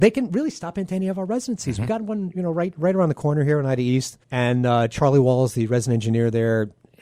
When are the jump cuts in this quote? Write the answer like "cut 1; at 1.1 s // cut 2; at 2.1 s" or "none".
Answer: cut 1; at 4.2 s